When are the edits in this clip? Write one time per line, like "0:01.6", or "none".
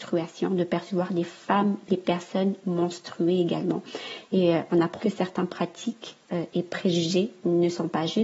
0:05.0